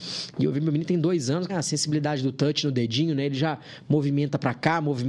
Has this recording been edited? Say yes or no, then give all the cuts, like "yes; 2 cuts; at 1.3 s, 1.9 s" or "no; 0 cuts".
yes; 1 cut; at 1.5 s